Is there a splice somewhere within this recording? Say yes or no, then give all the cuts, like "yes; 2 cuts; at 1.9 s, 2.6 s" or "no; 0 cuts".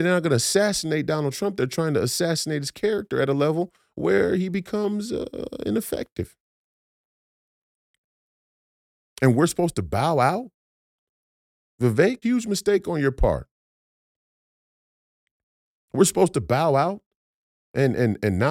yes; 1 cut; at 12.2 s